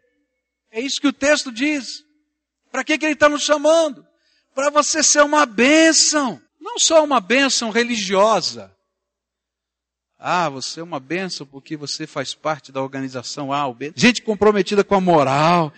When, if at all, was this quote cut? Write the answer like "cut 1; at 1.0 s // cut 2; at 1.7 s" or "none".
cut 1; at 6.5 s // cut 2; at 13.9 s